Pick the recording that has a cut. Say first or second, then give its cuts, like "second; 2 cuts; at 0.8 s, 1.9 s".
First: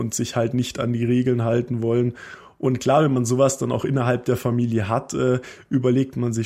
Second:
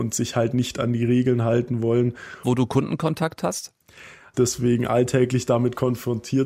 second; 2 cuts; at 2.4 s, 4.3 s